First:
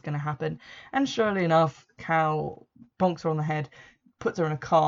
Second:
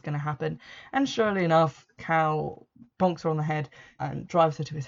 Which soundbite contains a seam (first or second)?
second